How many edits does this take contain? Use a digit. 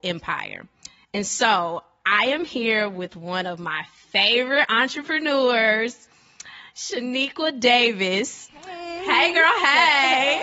0